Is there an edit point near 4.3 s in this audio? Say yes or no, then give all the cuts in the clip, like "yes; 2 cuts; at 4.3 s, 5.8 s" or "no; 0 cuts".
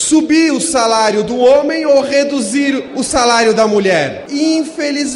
yes; 1 cut; at 4.3 s